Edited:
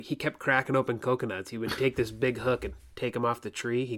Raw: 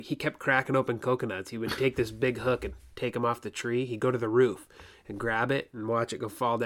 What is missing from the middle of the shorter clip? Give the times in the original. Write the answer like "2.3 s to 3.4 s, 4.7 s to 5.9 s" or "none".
none